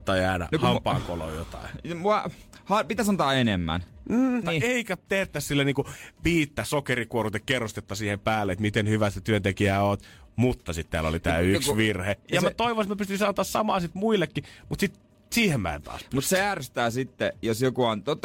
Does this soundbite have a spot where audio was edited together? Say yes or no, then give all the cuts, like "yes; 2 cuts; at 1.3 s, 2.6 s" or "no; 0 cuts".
yes; 2 cuts; at 4.4 s, 12.2 s